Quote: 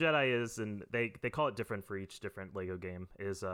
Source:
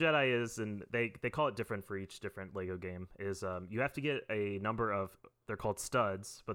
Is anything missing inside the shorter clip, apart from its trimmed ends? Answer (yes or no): no